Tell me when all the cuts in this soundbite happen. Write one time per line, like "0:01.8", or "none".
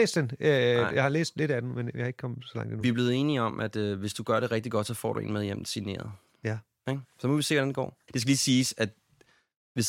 none